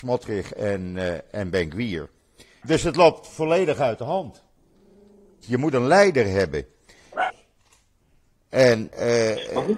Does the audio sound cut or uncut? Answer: cut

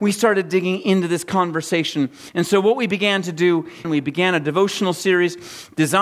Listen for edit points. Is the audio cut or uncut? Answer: cut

